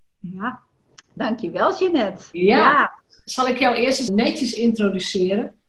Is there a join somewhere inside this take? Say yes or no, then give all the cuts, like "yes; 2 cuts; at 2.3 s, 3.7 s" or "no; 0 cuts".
yes; 2 cuts; at 1.0 s, 4.1 s